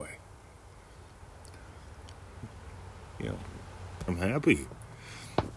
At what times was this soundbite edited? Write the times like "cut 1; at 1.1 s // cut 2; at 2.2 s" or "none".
cut 1; at 4.1 s